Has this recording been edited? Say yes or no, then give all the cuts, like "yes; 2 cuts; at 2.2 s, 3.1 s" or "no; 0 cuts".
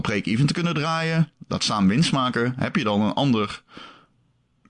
no; 0 cuts